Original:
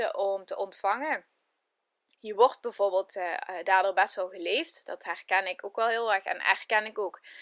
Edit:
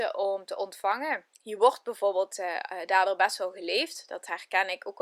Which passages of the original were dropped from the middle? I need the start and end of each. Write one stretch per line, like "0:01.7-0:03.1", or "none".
0:01.3-0:02.1